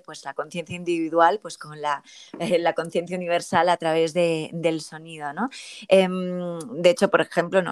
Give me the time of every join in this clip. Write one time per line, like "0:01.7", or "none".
none